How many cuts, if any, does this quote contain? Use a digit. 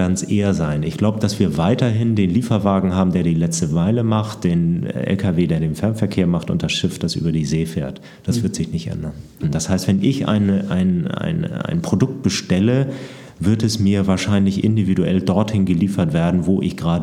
1